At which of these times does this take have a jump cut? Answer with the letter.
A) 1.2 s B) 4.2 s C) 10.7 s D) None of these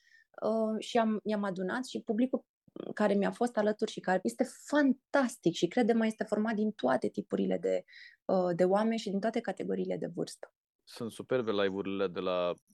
B